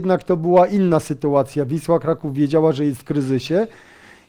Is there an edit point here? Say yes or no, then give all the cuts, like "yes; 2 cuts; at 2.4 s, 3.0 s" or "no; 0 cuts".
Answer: no; 0 cuts